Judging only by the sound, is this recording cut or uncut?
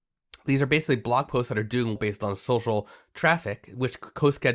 cut